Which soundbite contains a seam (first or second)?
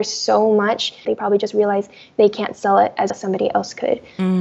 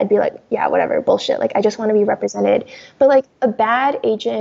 first